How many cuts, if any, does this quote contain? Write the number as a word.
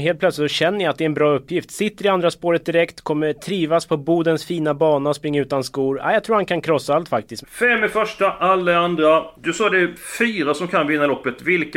two